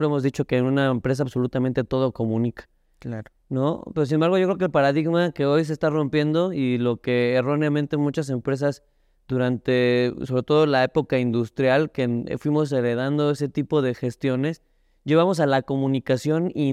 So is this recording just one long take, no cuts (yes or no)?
yes